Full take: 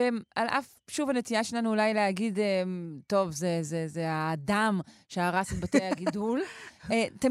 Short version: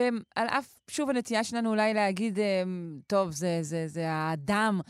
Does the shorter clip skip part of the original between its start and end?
no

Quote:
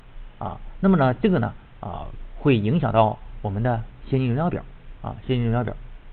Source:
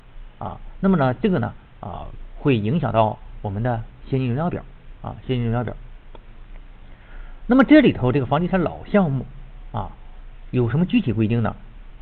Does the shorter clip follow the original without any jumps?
yes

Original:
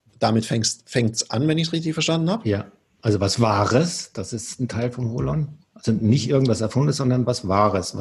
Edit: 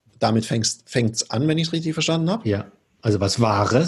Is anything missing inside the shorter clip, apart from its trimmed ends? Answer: no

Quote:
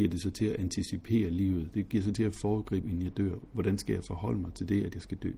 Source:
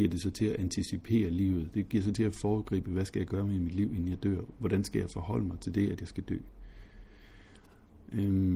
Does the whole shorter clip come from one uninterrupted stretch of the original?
no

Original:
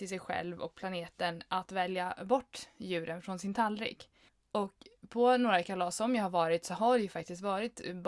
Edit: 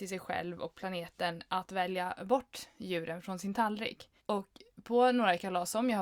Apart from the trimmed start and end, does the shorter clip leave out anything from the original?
yes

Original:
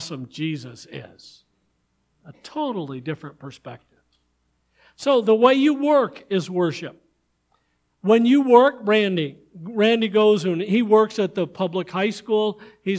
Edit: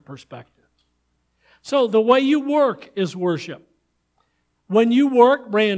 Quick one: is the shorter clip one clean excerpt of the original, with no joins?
yes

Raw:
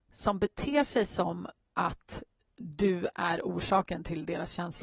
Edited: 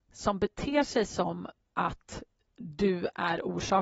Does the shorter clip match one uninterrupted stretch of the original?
yes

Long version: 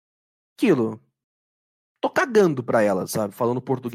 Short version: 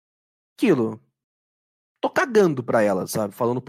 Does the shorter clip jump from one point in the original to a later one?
no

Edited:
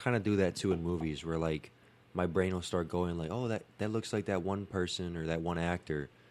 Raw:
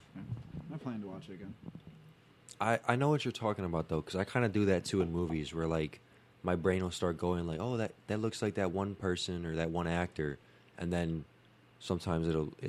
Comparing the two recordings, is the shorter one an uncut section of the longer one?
yes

